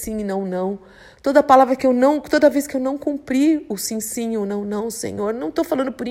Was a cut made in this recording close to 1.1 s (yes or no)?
no